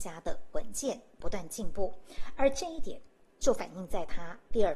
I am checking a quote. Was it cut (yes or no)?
yes